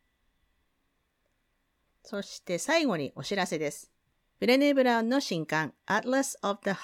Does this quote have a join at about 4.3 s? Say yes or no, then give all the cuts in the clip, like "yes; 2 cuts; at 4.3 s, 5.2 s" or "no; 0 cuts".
no; 1 cut; at 2.0 s